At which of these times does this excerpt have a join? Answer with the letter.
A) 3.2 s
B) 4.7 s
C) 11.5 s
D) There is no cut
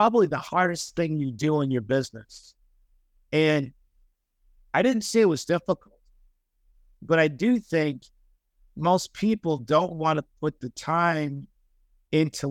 D